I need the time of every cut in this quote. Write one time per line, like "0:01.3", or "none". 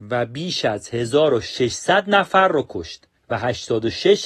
0:03.2